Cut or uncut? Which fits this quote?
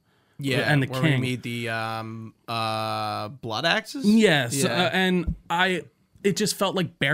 uncut